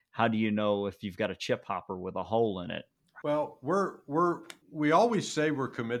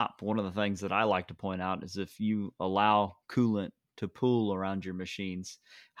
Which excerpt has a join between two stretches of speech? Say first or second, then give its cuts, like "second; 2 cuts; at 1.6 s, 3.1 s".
first; 2 cuts; at 3.2 s, 4.6 s